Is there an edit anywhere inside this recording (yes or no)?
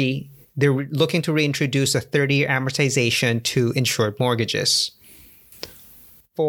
no